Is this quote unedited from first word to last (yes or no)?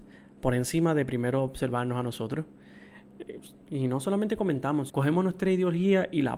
no